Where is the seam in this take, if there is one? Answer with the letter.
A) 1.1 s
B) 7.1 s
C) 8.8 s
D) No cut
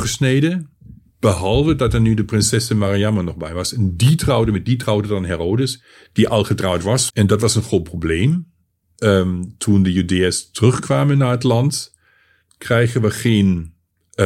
B